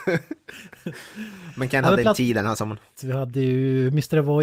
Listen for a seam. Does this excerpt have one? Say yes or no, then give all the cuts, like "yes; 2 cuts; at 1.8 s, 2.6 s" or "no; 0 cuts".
yes; 1 cut; at 3.0 s